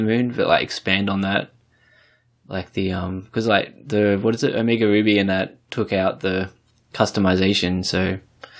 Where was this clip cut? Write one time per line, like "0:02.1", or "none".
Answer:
none